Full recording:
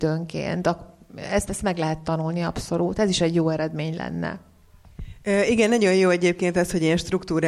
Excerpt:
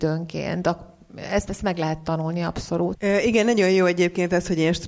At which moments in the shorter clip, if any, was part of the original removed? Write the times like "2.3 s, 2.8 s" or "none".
3.0 s